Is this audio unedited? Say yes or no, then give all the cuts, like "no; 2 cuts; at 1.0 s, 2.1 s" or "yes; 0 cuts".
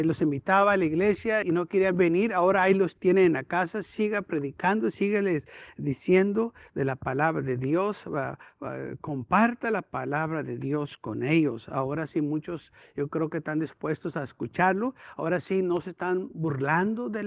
no; 1 cut; at 1.4 s